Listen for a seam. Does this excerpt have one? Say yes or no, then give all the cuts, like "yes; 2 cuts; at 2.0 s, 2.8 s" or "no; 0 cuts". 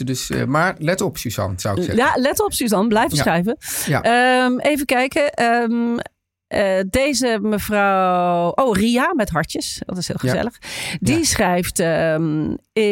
no; 0 cuts